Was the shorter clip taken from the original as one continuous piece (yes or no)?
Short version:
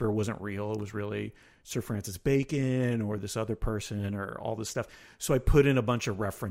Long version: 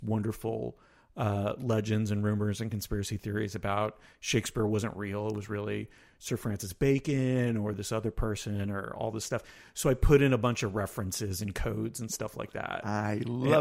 yes